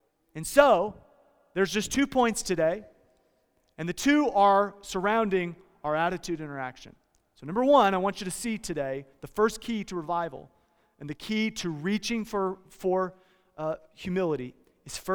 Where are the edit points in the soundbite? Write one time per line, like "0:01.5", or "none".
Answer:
none